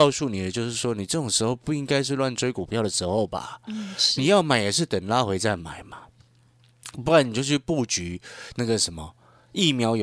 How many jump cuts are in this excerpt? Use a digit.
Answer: 0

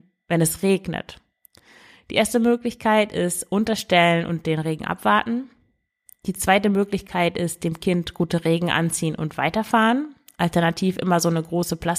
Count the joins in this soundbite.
0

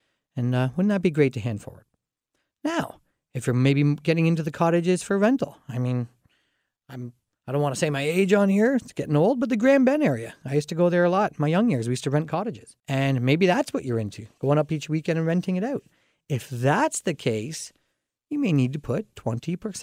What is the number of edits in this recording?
1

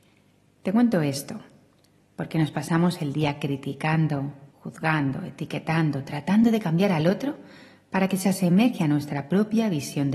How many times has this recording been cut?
1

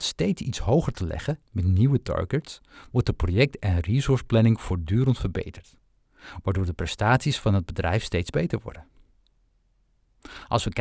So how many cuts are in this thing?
0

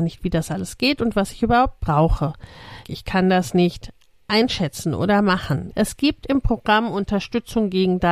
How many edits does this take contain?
2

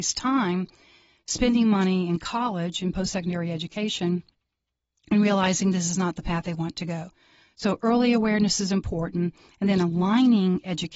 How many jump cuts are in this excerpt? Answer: 0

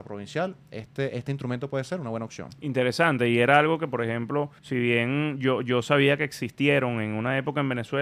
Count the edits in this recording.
1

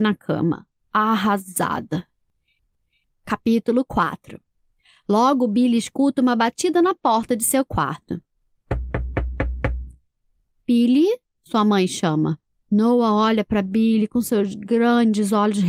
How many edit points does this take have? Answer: 1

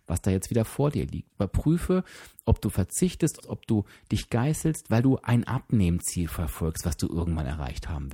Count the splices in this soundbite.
2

